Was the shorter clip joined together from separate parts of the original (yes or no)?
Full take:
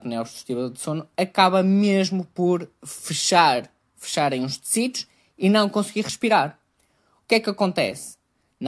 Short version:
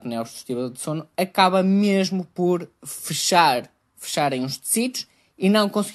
no